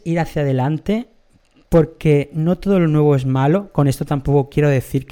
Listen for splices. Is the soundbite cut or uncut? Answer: uncut